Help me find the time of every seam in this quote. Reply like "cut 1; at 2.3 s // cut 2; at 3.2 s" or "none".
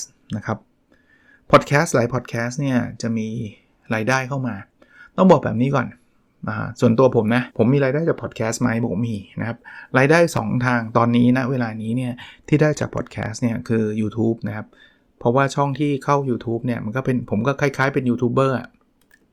cut 1; at 7.5 s